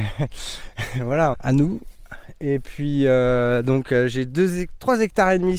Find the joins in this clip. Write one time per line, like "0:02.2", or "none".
0:01.3